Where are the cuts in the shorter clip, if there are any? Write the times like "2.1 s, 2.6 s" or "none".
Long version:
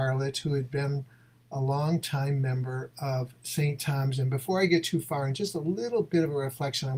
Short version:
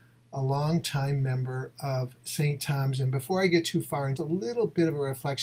4.2 s